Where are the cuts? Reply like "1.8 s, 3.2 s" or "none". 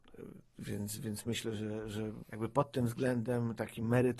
1.0 s

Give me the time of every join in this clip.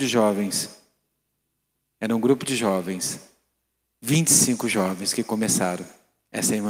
none

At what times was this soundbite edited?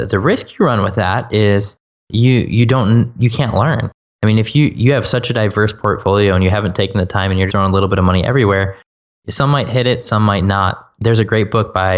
7.5 s

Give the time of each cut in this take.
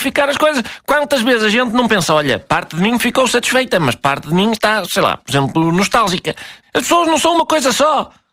6.6 s

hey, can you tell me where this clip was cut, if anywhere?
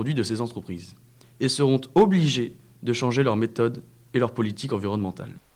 none

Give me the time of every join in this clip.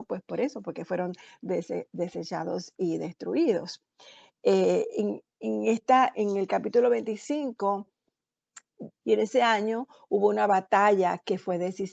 4.3 s, 6.1 s, 9.0 s

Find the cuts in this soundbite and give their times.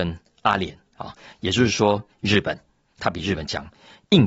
2.1 s

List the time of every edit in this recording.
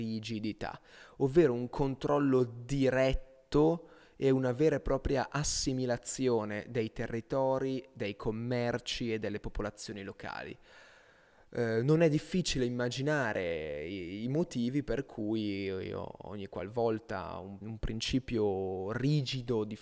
17.6 s

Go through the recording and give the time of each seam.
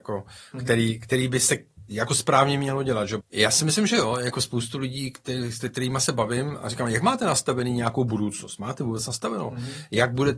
3.2 s

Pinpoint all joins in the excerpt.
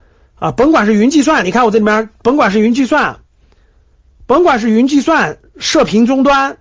none

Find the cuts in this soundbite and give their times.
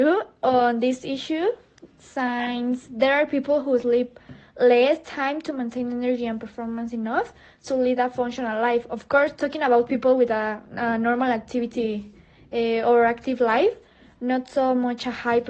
none

